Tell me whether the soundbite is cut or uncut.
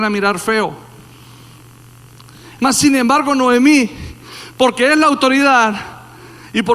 cut